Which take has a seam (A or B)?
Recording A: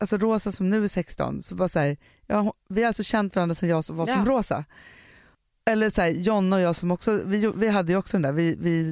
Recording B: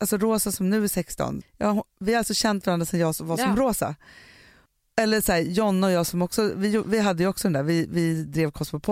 B